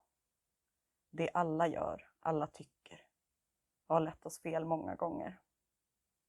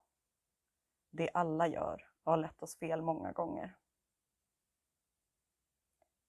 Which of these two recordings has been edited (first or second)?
second